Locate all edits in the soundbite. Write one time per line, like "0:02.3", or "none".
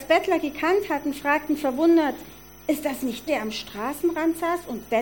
0:03.3